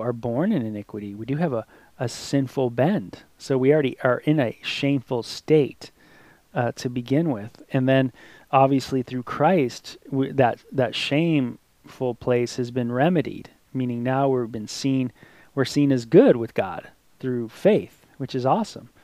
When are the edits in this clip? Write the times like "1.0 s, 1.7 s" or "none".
none